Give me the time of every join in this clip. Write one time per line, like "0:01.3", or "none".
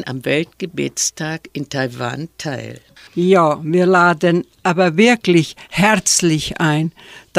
0:03.1